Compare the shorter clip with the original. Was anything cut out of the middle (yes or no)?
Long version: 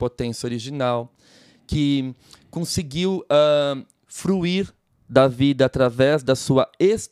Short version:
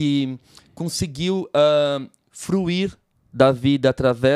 no